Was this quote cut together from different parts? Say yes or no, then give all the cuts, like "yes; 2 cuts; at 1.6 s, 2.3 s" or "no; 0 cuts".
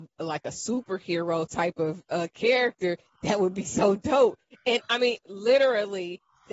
no; 0 cuts